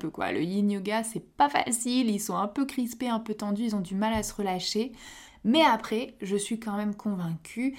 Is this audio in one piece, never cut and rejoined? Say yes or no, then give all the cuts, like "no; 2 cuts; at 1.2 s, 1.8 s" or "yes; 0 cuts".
no; 1 cut; at 5.3 s